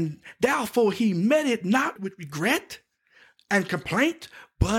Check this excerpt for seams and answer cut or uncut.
cut